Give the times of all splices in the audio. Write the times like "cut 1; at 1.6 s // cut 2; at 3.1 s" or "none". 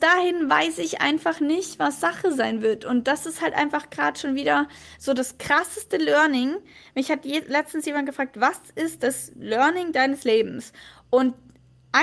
none